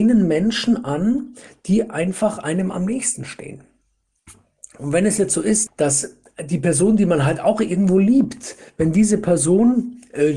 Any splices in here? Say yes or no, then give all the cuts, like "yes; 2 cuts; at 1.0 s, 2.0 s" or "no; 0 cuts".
yes; 1 cut; at 5.7 s